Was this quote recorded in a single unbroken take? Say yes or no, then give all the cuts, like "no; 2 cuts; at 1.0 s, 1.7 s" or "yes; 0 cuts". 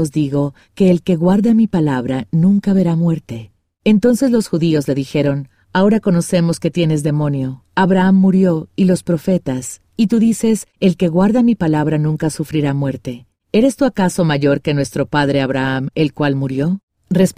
yes; 0 cuts